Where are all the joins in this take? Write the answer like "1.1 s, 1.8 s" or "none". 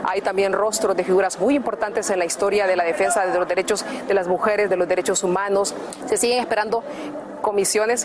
6.0 s